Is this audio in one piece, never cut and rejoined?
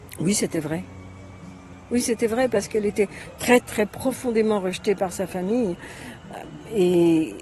no; 1 cut; at 3.6 s

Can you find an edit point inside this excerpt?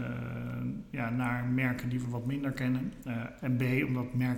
yes; 1 cut; at 3.4 s

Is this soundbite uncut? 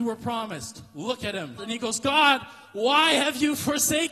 no; 1 cut; at 1.6 s

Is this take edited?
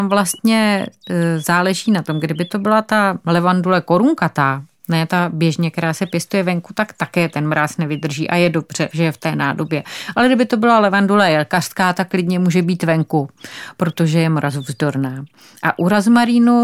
yes; 1 cut; at 8.9 s

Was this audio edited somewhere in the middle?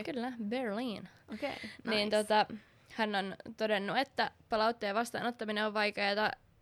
no; 0 cuts

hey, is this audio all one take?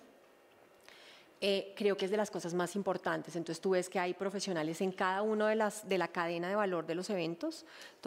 yes; 0 cuts

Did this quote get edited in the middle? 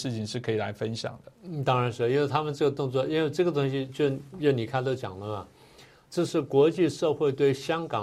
no; 0 cuts

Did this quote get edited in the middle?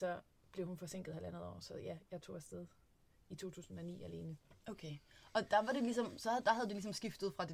no; 0 cuts

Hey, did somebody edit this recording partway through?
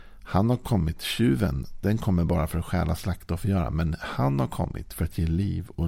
no; 0 cuts

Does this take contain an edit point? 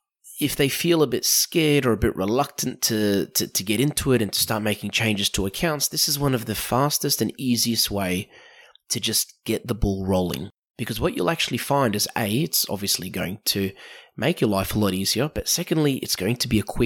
no; 0 cuts

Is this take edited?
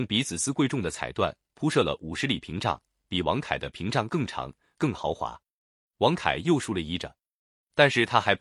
no; 0 cuts

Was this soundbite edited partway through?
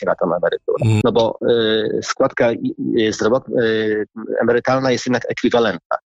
yes; 1 cut; at 1.0 s

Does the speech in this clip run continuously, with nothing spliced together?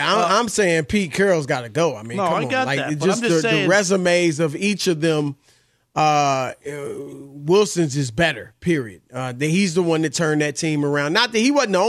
yes; 0 cuts

